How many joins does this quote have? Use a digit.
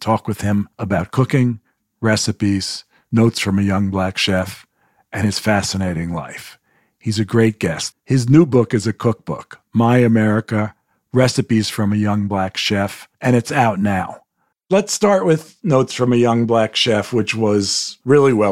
3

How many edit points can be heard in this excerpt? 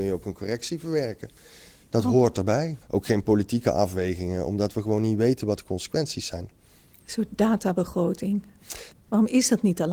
2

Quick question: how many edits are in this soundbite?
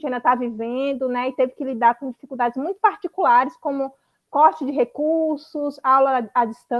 0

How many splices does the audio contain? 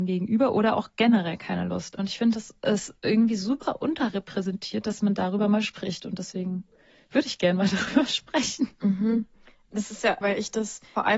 2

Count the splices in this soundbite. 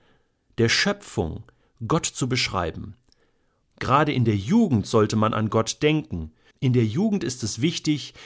2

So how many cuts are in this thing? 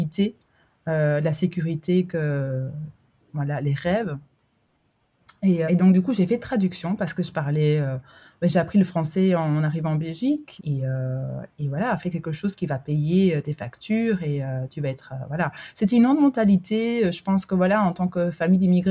2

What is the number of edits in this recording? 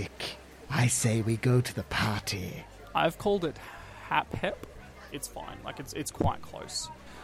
1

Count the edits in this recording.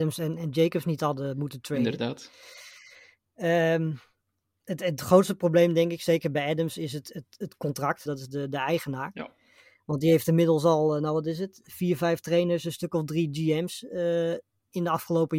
1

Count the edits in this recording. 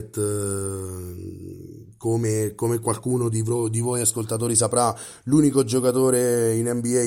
0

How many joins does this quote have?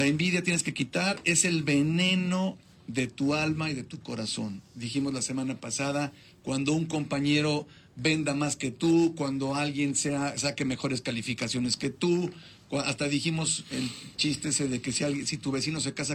0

